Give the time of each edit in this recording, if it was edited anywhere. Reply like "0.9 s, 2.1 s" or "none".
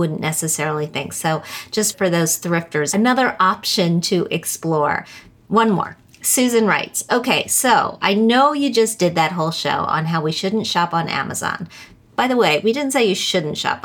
none